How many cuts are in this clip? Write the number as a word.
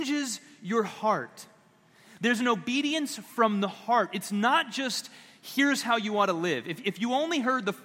one